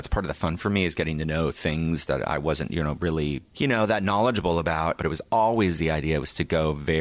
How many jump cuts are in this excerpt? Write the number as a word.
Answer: one